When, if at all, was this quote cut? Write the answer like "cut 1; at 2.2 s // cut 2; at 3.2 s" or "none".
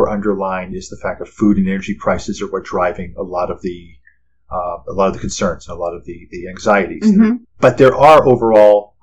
cut 1; at 7.4 s